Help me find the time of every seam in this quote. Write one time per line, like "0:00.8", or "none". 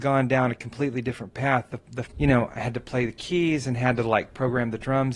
0:02.1